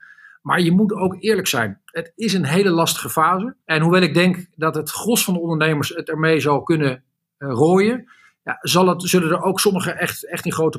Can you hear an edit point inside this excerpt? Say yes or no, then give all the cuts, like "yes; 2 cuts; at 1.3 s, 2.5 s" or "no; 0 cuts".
yes; 1 cut; at 3.6 s